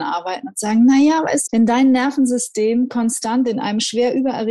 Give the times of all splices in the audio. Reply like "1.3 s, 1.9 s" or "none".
1.5 s